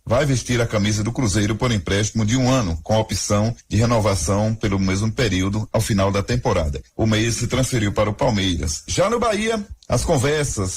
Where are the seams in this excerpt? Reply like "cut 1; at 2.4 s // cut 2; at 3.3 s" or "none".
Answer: cut 1; at 6.9 s // cut 2; at 8.9 s